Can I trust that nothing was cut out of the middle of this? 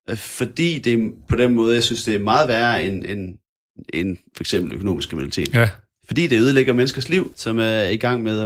no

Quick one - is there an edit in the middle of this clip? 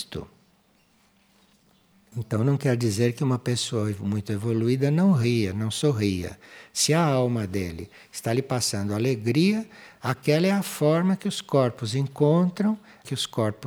no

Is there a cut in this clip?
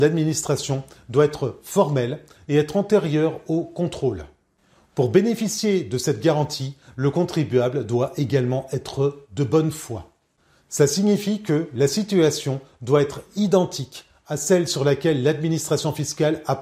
no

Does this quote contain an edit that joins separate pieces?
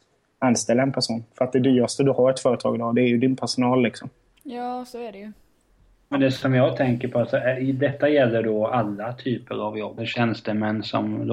yes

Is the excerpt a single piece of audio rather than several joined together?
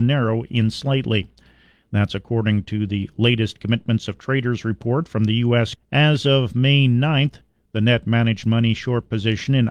no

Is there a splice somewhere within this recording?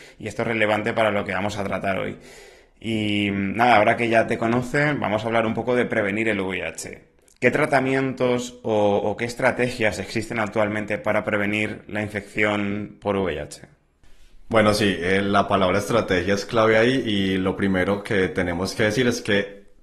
no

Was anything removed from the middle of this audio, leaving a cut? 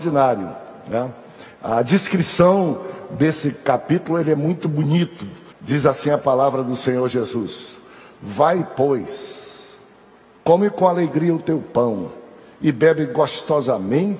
yes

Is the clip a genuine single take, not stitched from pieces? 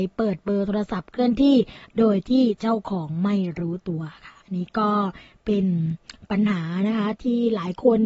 no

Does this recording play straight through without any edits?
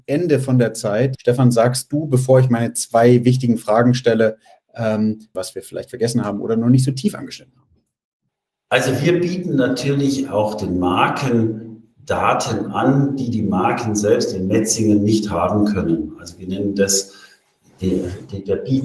no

